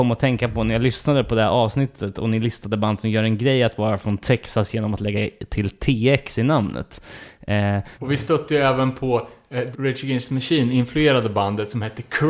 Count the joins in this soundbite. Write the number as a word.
two